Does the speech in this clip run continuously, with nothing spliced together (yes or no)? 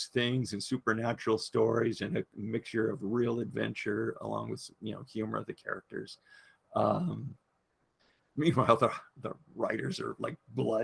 yes